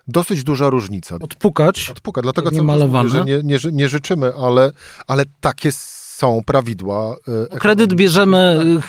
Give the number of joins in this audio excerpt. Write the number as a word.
one